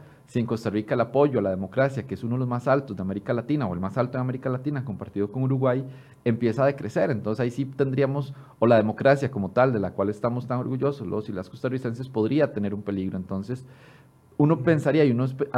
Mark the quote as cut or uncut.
uncut